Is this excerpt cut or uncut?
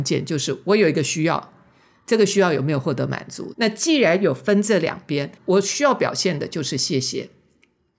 cut